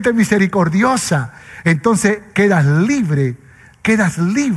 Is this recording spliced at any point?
no; 0 cuts

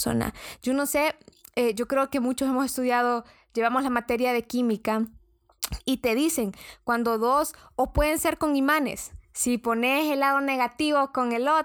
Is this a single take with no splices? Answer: yes; 0 cuts

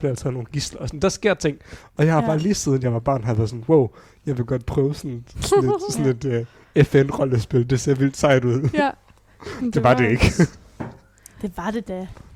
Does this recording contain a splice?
no; 0 cuts

